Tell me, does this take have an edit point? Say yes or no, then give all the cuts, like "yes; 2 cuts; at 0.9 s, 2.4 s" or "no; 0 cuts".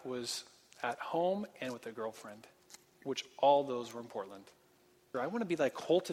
yes; 1 cut; at 5.1 s